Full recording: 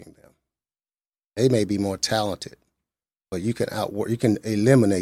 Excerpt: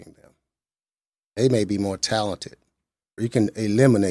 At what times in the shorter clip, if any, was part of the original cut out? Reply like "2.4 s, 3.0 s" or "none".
3.2 s